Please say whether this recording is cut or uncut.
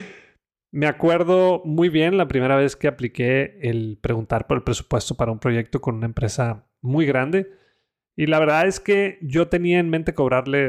uncut